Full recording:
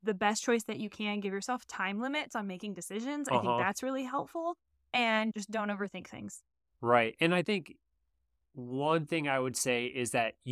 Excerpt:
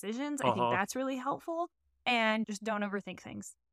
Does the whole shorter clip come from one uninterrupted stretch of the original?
yes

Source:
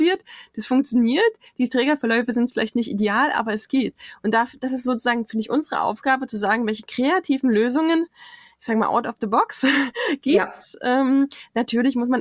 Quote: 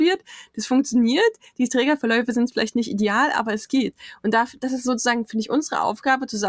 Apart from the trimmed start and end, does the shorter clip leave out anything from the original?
no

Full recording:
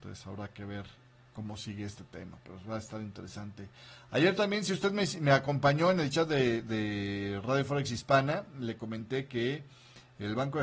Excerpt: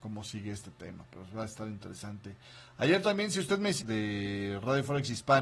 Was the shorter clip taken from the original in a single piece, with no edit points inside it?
no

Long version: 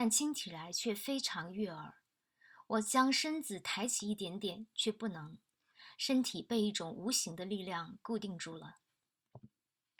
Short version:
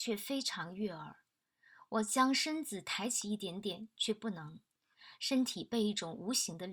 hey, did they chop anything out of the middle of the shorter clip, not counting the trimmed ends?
no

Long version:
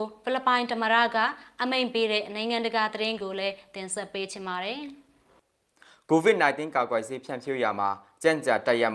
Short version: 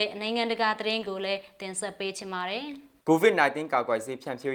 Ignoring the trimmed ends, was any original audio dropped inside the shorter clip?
yes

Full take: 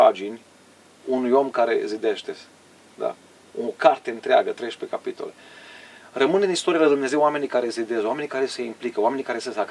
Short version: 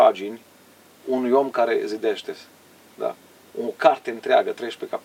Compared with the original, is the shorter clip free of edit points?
yes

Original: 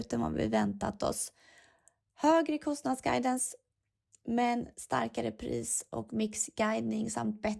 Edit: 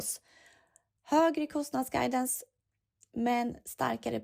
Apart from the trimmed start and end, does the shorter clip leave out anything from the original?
no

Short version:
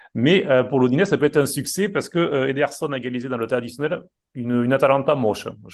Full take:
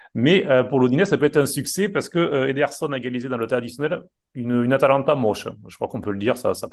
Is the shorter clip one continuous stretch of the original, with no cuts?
yes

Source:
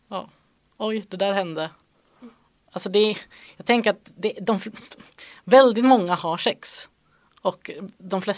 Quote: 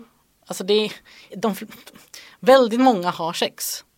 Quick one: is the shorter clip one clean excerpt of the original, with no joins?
no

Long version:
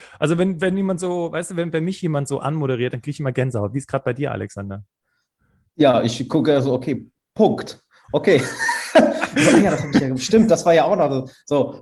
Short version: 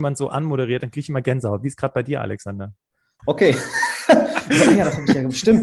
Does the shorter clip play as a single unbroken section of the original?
no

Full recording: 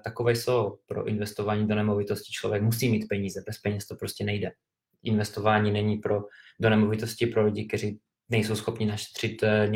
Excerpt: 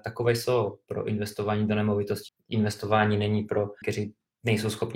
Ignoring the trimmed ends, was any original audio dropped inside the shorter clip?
yes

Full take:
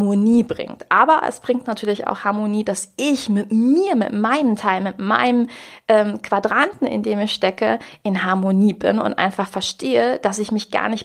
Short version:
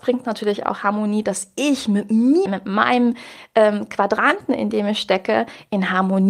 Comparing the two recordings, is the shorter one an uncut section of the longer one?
no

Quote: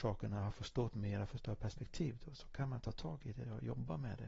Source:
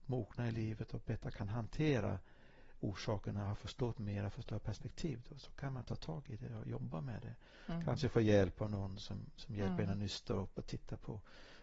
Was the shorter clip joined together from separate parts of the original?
no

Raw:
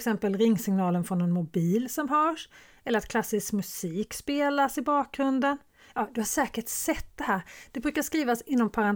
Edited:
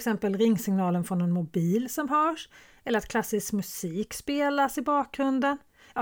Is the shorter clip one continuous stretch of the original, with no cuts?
yes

